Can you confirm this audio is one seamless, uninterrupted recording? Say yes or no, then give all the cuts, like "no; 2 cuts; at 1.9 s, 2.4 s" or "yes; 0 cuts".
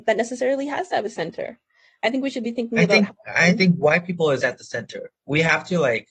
no; 1 cut; at 4.4 s